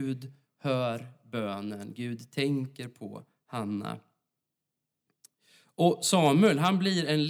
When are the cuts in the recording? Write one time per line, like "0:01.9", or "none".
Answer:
none